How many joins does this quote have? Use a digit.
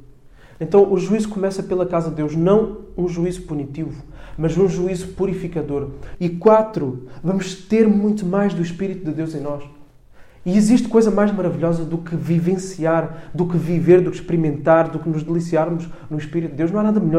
1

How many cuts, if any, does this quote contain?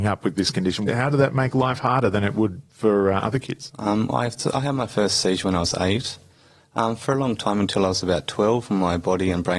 0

